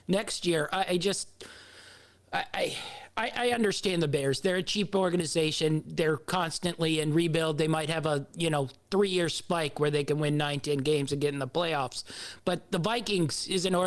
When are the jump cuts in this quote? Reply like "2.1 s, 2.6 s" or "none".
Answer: none